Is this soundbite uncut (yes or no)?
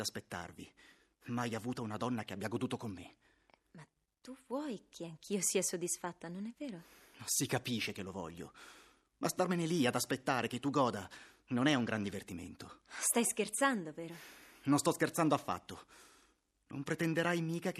yes